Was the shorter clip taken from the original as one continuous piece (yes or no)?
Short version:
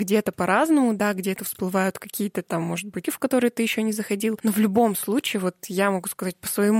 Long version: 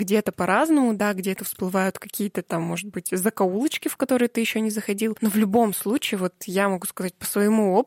no